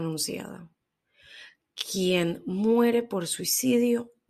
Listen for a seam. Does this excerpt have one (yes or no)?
no